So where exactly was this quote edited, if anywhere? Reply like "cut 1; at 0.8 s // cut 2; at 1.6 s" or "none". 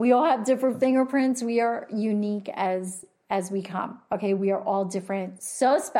none